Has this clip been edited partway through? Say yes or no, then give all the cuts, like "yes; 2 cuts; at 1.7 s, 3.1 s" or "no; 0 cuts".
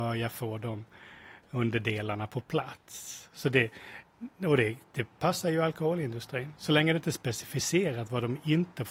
no; 0 cuts